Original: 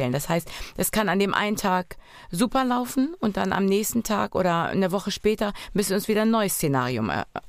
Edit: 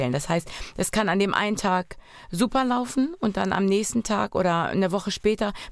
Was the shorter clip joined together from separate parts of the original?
no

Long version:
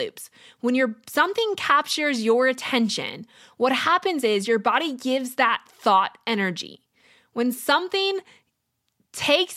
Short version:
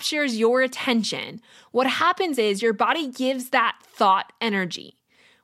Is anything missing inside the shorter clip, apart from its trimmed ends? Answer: no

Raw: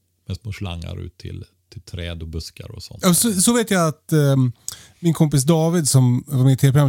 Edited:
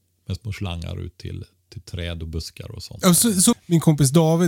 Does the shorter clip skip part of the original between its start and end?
yes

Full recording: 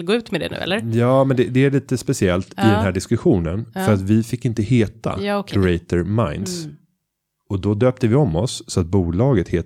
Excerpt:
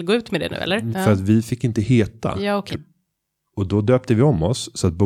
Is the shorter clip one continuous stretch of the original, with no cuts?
no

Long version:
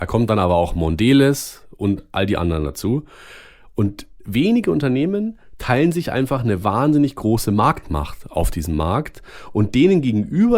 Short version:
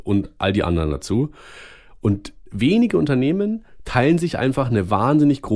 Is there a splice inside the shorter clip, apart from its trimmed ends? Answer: no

